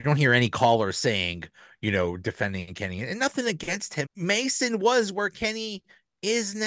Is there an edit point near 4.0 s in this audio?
yes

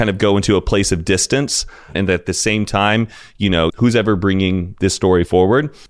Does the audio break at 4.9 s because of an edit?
no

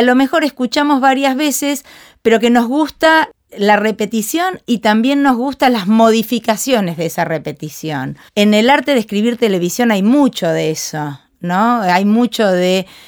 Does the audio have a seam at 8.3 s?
yes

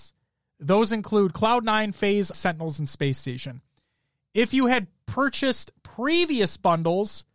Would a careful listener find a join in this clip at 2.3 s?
yes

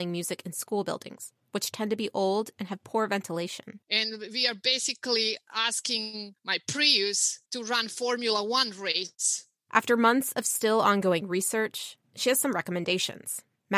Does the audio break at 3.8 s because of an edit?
yes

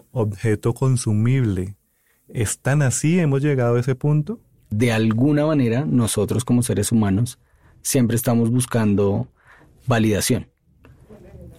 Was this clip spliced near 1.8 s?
no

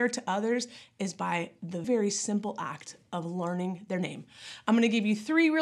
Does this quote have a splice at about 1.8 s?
yes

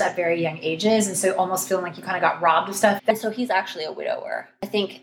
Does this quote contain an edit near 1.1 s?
no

